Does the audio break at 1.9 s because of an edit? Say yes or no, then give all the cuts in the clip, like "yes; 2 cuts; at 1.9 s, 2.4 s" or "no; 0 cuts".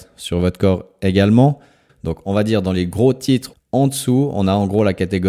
yes; 2 cuts; at 1.9 s, 3.5 s